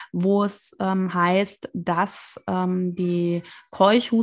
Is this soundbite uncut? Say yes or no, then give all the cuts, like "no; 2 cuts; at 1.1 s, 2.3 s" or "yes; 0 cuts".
yes; 0 cuts